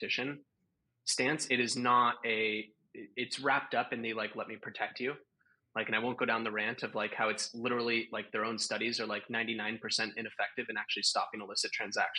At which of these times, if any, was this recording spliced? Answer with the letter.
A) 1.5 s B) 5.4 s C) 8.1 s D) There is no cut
D